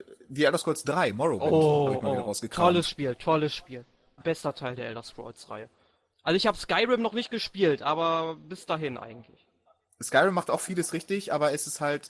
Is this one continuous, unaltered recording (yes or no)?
no